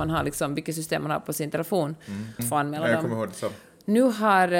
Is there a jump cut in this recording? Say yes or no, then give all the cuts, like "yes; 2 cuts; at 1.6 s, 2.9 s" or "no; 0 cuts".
yes; 1 cut; at 2.4 s